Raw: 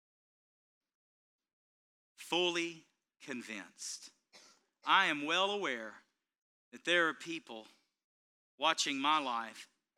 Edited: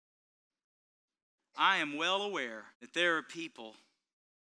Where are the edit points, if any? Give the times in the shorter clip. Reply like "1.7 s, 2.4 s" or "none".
1.4 s, 2.7 s